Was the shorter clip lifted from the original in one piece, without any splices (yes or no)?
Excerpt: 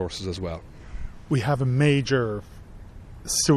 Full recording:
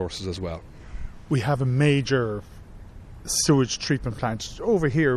yes